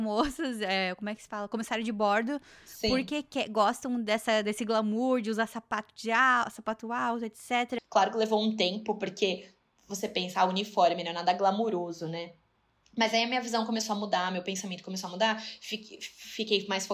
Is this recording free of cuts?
no; 1 cut; at 7.8 s

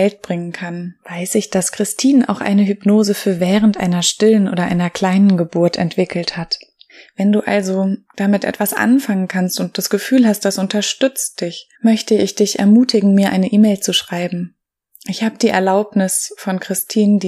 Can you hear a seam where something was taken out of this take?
yes; 1 cut; at 11.7 s

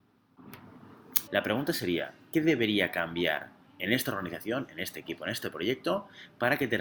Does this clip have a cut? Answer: yes; 1 cut; at 1.3 s

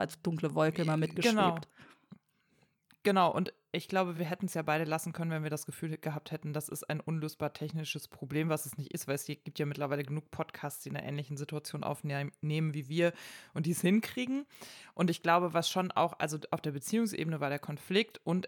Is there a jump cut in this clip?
no; 0 cuts

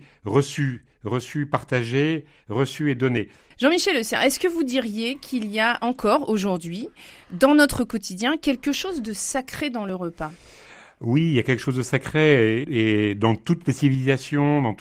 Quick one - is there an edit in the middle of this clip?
yes; 2 cuts; at 3.5 s, 12.6 s

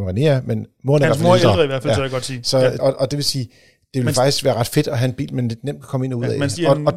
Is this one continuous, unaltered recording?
no; 1 cut; at 2.8 s

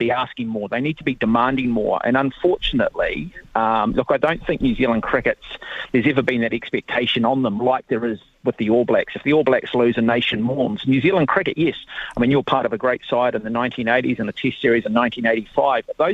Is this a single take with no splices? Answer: yes; 0 cuts

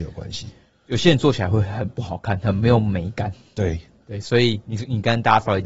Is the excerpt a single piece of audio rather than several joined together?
yes; 0 cuts

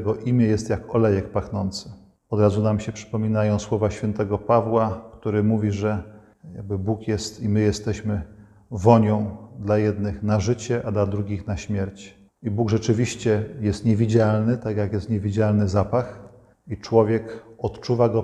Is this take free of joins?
yes; 0 cuts

